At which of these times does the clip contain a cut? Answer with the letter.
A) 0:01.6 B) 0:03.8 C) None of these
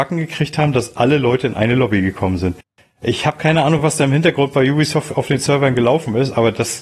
C